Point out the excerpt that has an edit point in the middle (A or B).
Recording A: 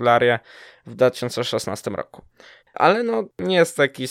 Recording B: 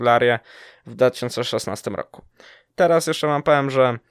A